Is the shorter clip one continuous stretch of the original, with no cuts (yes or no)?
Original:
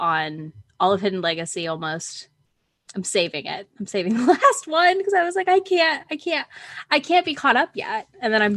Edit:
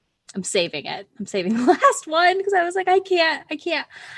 yes